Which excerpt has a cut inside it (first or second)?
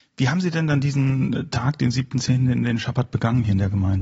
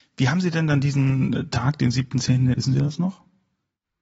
second